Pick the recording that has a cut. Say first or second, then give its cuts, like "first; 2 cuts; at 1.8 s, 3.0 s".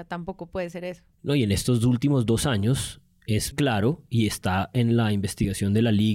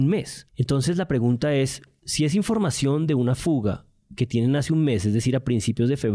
first; 2 cuts; at 1.1 s, 3.5 s